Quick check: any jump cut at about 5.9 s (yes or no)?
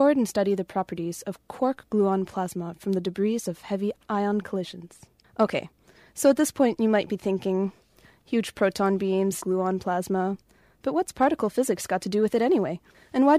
no